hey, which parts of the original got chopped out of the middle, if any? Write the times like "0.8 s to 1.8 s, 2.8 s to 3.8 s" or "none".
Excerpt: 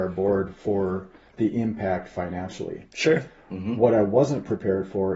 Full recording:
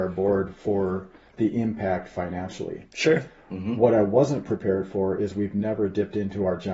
none